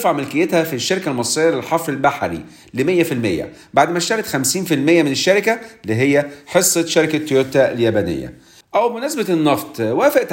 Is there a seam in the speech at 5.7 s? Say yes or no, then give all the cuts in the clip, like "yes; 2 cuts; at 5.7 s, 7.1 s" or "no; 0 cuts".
no; 1 cut; at 8.6 s